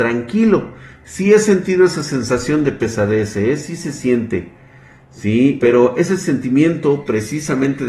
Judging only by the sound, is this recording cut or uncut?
cut